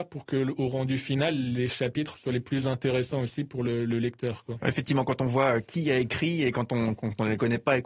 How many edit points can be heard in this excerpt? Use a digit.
0